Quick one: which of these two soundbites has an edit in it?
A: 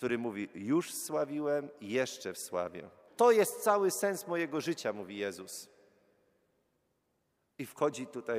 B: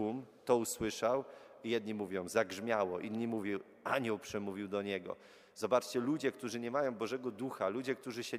A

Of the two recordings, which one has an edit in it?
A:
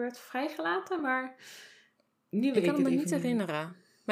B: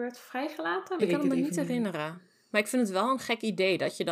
B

